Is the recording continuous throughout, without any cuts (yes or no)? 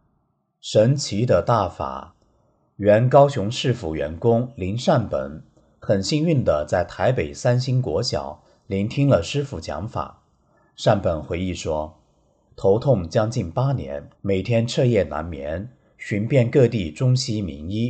no